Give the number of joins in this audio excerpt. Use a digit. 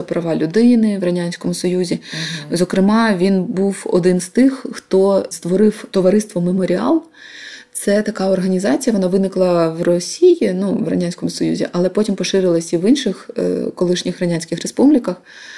0